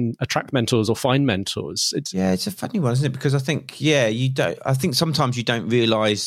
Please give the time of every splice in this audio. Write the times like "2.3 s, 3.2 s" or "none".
2.0 s